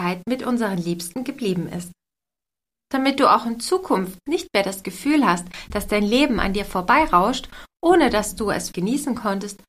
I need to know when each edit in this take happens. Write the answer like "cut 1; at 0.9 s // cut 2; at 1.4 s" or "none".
cut 1; at 8.7 s